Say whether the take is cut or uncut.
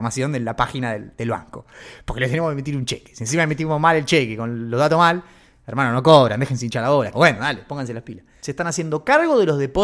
cut